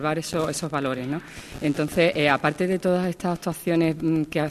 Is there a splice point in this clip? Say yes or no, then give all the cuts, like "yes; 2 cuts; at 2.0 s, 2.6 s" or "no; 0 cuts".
no; 0 cuts